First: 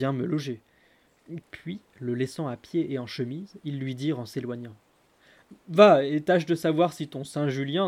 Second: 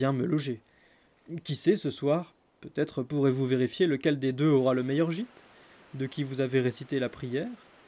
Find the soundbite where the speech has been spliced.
first; 1 cut; at 1.4 s

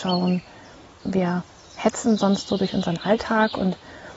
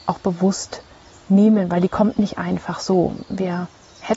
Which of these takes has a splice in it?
first; 1 cut; at 1.0 s

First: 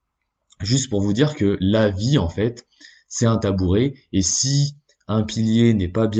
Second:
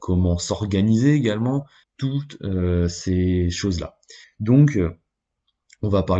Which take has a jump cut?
second; 2 cuts; at 1.8 s, 4.2 s

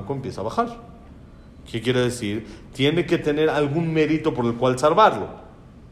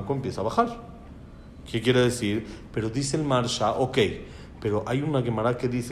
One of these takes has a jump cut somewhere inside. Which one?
second; 1 cut; at 2.7 s

